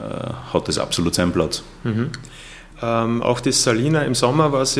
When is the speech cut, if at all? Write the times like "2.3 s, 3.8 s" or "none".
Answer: 2.7 s

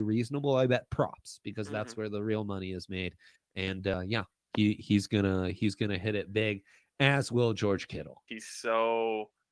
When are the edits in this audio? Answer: 3.4 s, 8.3 s

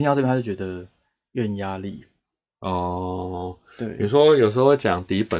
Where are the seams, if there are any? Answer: none

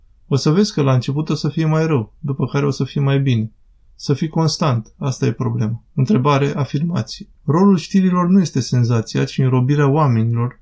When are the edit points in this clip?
5.9 s, 7.4 s

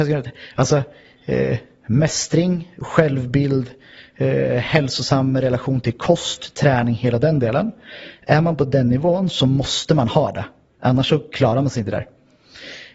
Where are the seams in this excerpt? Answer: none

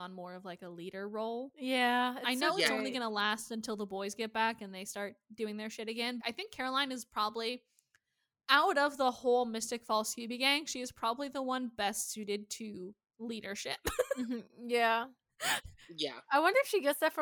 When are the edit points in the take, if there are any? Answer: 6.2 s

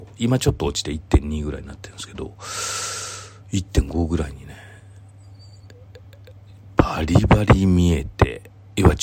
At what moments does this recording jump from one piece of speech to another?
none

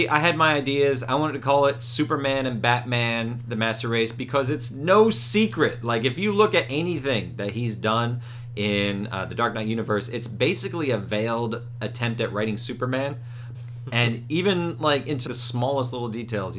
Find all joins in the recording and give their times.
13.5 s, 15.3 s

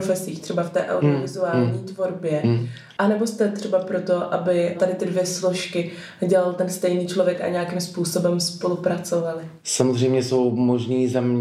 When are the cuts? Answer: 3.0 s

